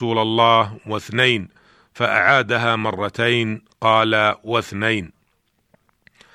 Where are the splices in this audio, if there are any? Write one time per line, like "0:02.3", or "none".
none